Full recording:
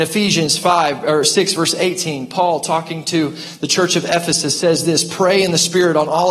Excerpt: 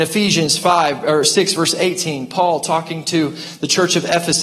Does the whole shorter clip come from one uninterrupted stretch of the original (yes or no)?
yes